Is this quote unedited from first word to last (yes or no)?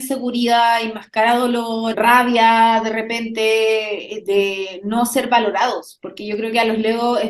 no